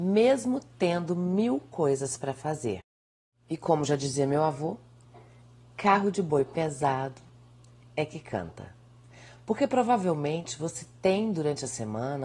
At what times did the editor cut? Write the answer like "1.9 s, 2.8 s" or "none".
none